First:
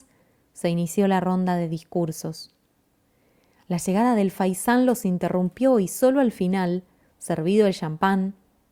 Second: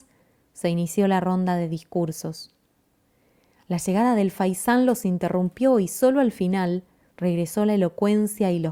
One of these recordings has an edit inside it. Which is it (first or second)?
second